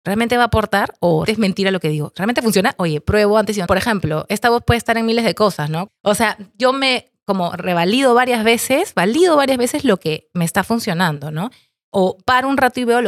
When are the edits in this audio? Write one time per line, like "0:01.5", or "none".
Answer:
0:01.3
0:03.7
0:05.9